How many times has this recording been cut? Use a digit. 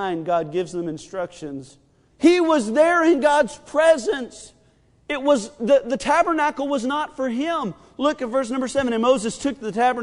1